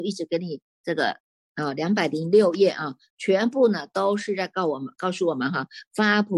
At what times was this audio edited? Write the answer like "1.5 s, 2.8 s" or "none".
1.5 s